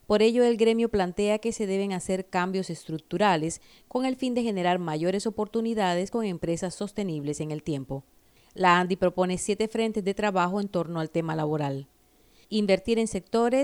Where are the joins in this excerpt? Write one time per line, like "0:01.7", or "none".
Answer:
none